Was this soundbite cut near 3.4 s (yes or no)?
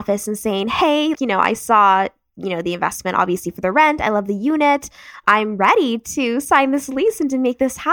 no